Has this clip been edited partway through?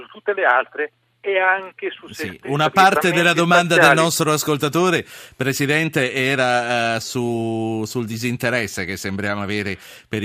no; 0 cuts

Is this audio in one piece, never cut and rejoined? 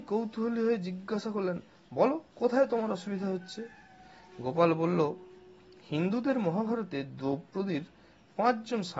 no; 1 cut; at 2.3 s

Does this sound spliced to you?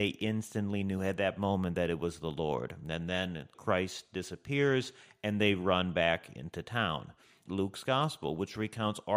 yes; 2 cuts; at 3.5 s, 7.5 s

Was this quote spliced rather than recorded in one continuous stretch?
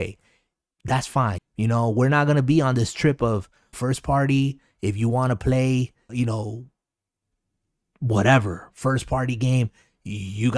yes; 3 cuts; at 1.4 s, 3.7 s, 6.1 s

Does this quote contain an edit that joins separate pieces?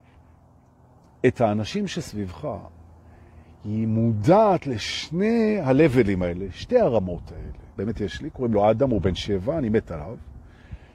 yes; 1 cut; at 7.8 s

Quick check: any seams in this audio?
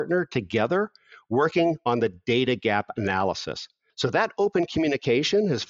yes; 1 cut; at 3.9 s

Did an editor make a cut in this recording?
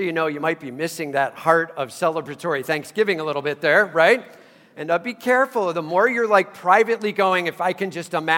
no; 0 cuts

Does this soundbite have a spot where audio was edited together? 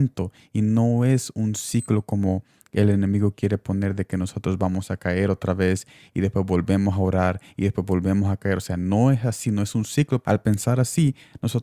yes; 1 cut; at 10.2 s

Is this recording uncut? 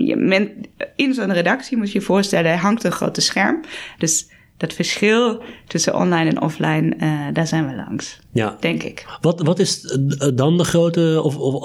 no; 1 cut; at 4.0 s

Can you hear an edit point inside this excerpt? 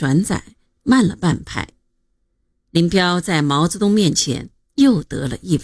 no; 0 cuts

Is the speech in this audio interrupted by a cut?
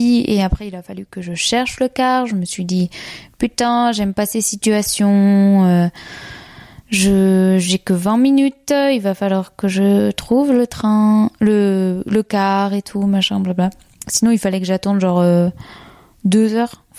no; 0 cuts

